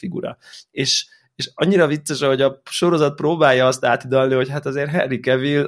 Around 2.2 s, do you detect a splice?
no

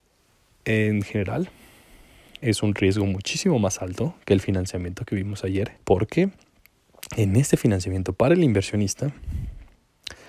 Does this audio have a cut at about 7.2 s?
no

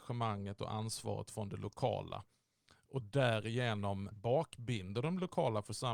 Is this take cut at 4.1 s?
yes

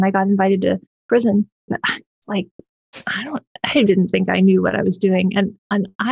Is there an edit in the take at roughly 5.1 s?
no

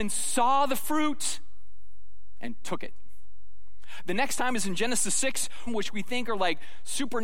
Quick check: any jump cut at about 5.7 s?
yes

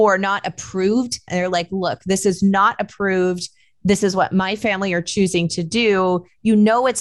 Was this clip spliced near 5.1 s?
no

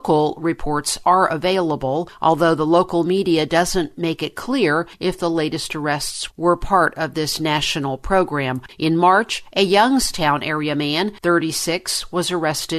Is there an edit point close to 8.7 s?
yes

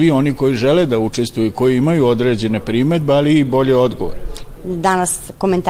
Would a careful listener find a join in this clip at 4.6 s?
yes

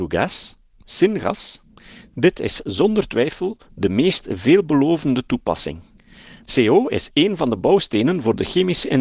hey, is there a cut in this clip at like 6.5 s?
yes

